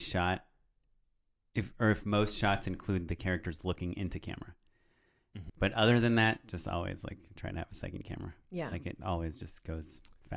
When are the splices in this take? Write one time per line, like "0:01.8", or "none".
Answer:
0:05.5

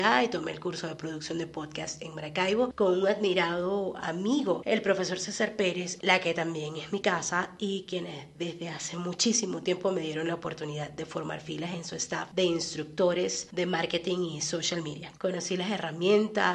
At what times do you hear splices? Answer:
0:06.0
0:15.2

